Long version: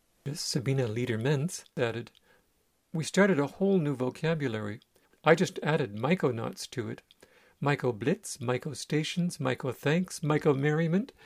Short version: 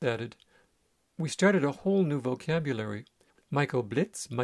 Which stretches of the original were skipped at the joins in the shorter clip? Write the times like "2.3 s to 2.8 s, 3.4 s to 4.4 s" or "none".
5.2 s to 7.6 s